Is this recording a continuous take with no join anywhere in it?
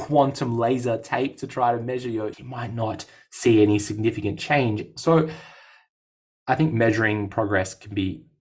no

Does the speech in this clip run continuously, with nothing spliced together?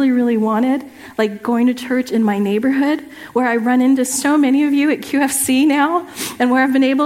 yes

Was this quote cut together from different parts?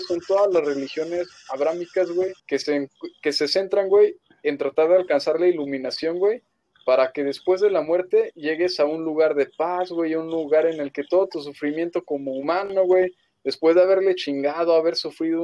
yes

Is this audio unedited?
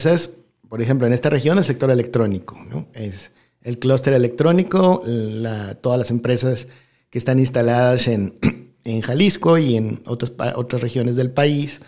yes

